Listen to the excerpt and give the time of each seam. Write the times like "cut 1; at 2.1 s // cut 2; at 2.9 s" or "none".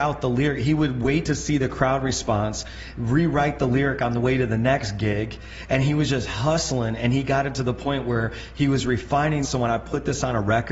cut 1; at 9.4 s